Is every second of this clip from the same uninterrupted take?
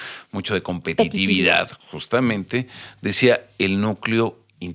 yes; 0 cuts

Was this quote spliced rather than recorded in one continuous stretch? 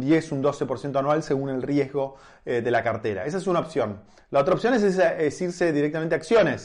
no; 0 cuts

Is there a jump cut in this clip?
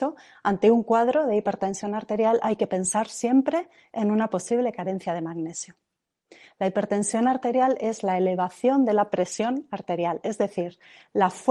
no; 0 cuts

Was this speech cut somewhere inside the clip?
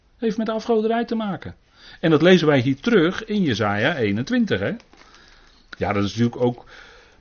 yes; 1 cut; at 5.8 s

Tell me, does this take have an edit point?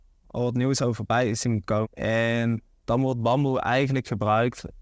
yes; 1 cut; at 1.8 s

